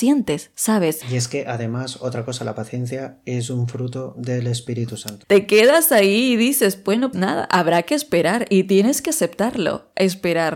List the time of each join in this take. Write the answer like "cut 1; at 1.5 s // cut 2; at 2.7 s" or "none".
cut 1; at 1.0 s // cut 2; at 5.2 s // cut 3; at 7.1 s